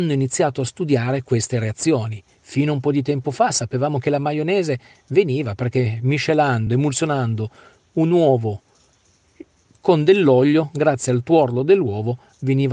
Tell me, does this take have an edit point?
no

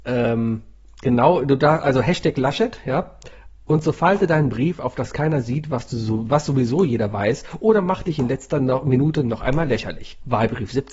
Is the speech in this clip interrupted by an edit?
no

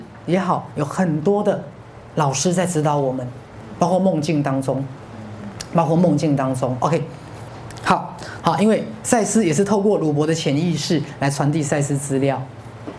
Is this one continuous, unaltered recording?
no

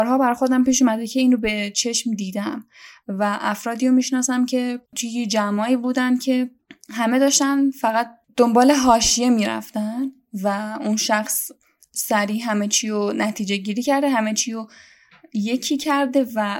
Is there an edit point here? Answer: yes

